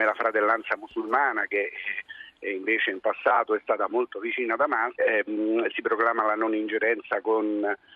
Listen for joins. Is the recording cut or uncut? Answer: cut